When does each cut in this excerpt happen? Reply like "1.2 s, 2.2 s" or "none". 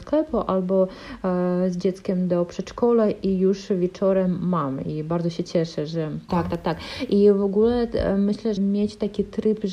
6.3 s, 8.6 s